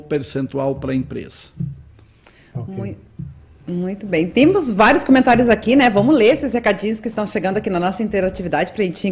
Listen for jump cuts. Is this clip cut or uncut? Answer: uncut